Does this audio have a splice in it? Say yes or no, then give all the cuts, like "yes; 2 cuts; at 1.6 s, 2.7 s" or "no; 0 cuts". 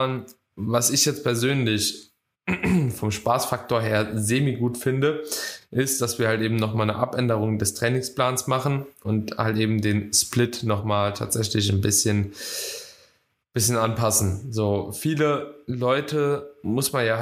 no; 0 cuts